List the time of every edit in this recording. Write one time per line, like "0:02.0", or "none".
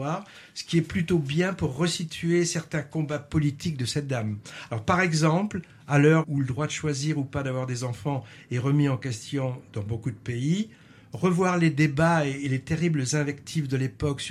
0:06.2